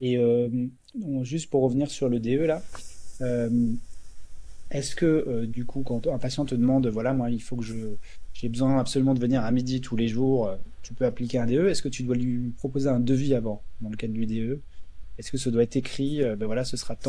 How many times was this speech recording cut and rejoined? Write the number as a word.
zero